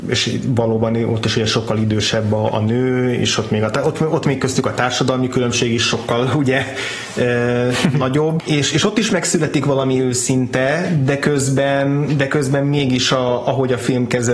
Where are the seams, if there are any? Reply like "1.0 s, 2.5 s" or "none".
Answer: 8.4 s